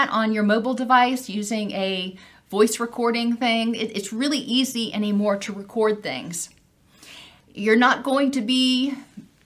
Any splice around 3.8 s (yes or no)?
no